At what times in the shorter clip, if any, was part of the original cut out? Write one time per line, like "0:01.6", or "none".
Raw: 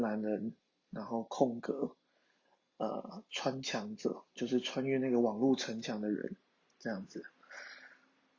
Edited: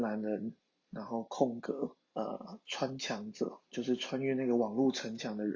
0:02.0